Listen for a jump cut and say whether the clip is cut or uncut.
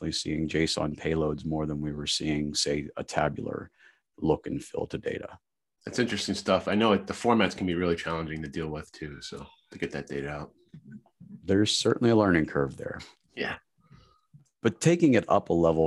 uncut